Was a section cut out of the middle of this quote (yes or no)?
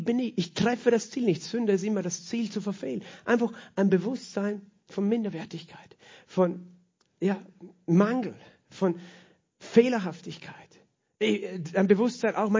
no